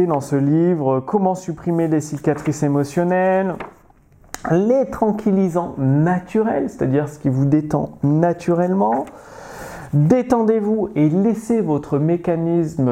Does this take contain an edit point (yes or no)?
yes